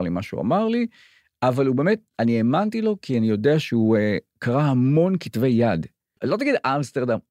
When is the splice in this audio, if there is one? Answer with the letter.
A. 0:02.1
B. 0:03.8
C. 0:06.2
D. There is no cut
C